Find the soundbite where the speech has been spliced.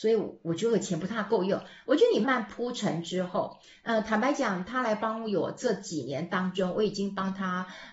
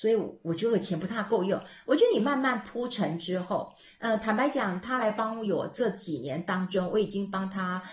first; 1 cut; at 2.2 s

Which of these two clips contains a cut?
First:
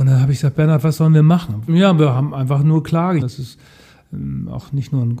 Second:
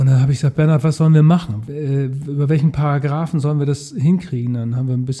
first; 2 cuts; at 1.7 s, 3.2 s

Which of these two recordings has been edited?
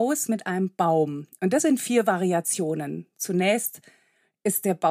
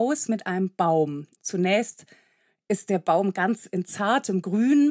second; 1 cut; at 1.4 s

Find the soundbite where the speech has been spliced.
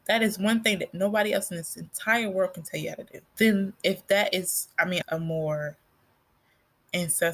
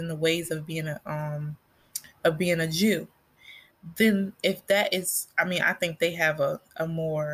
first; 2 cuts; at 3.3 s, 5.0 s

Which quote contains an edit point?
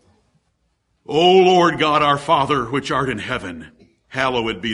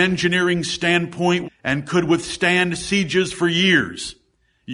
second; 1 cut; at 1.4 s

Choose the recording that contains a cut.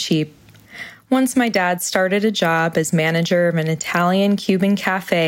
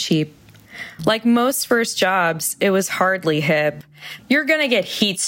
second; 2 cuts; at 1.0 s, 4.2 s

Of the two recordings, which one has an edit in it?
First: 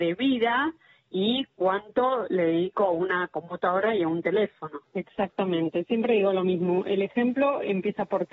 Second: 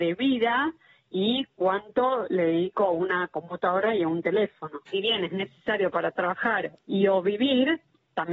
first; 1 cut; at 4.8 s

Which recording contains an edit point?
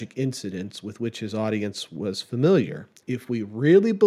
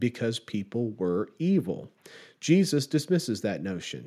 first; 1 cut; at 3.0 s

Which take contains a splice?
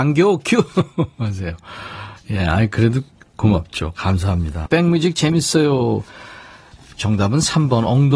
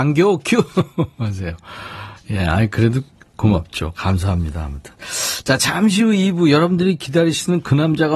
first; 1 cut; at 4.7 s

